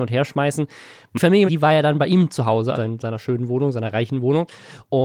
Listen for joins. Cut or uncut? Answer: cut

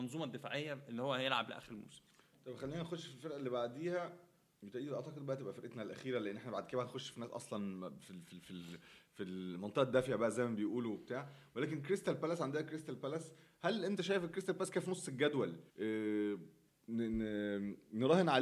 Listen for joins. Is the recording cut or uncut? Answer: cut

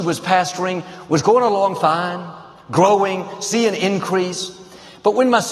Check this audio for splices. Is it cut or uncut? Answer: uncut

